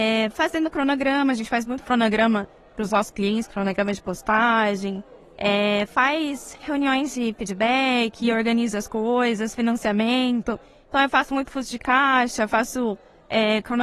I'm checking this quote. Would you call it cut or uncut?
uncut